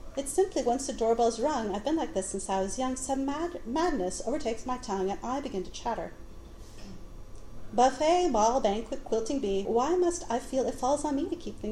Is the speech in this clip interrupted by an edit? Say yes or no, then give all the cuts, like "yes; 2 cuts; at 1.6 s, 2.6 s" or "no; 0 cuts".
yes; 1 cut; at 9.6 s